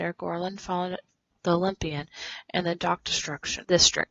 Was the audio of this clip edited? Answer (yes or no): yes